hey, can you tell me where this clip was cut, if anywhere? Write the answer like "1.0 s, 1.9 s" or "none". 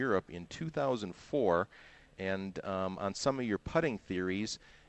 none